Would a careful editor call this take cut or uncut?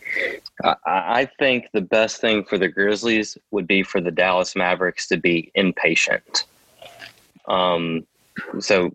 uncut